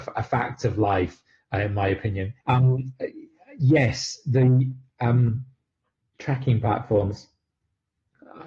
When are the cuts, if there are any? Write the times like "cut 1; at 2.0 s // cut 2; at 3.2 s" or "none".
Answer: cut 1; at 2.4 s